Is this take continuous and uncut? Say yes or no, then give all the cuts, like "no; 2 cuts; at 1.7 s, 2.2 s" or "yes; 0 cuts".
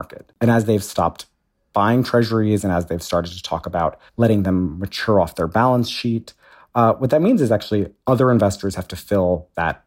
no; 1 cut; at 4.1 s